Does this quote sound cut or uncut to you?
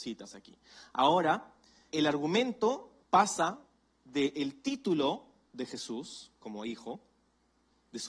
cut